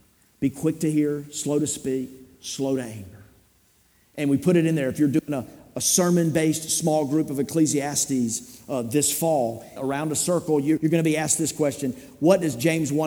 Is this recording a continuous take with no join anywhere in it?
no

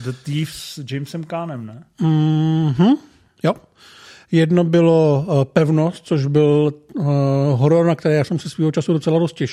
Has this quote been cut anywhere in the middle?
no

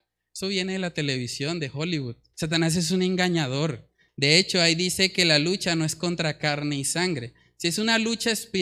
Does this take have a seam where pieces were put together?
yes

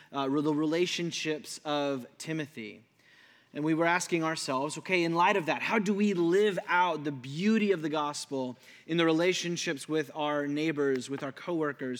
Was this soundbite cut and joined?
no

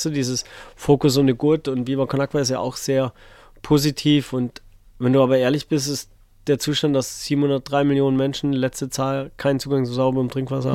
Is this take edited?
no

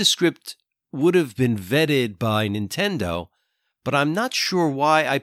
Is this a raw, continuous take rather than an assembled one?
yes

